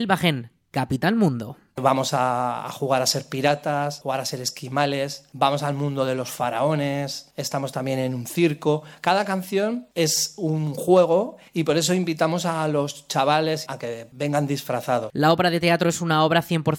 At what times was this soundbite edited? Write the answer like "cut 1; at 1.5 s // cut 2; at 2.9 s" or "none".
cut 1; at 4.0 s // cut 2; at 15.1 s